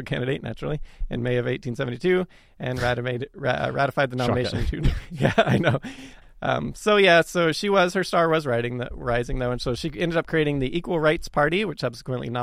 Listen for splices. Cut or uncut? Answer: cut